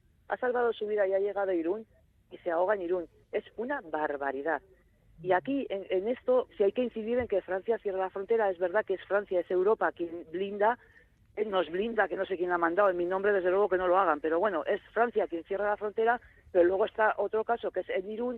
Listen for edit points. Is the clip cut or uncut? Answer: cut